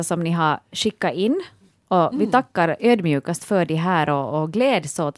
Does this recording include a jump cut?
no; 0 cuts

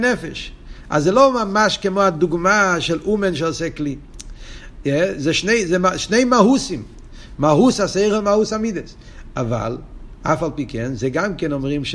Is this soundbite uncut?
yes; 0 cuts

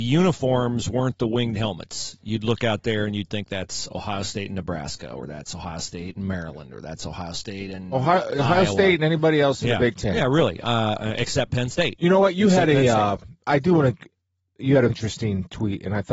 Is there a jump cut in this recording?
yes; 2 cuts; at 13.5 s, 14.9 s

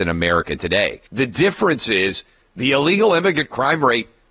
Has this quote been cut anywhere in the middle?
yes; 1 cut; at 1.1 s

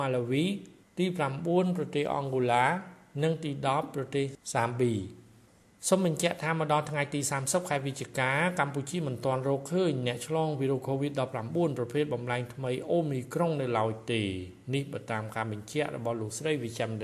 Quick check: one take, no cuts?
yes; 0 cuts

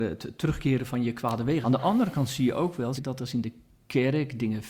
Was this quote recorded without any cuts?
no; 2 cuts; at 1.6 s, 3.0 s

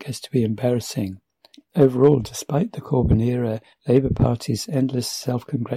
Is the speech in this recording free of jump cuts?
no; 1 cut; at 1.5 s

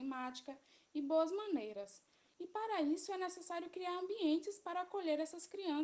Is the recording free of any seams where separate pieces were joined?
no; 1 cut; at 2.3 s

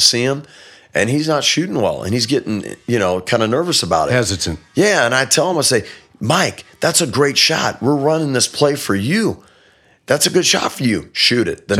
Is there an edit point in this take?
no; 0 cuts

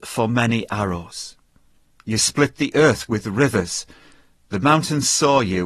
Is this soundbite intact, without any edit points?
yes; 0 cuts

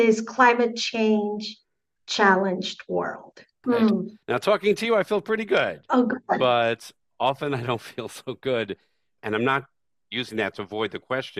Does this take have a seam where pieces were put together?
yes; 2 cuts; at 3.6 s, 9.2 s

